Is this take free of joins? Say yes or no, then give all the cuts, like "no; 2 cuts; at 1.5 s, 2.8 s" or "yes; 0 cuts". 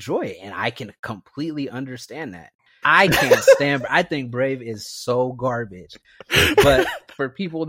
no; 1 cut; at 2.8 s